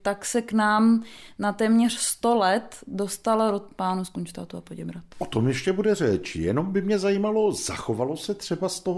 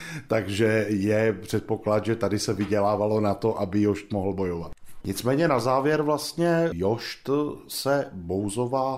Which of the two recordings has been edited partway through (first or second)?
second